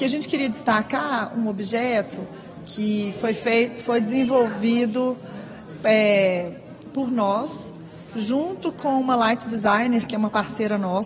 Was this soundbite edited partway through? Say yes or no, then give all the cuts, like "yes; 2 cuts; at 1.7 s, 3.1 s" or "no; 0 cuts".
no; 0 cuts